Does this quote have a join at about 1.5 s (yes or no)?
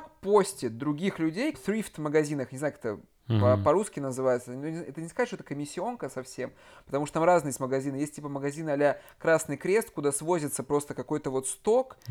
yes